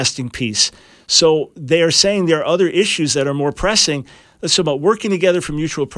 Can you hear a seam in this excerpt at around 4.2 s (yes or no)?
yes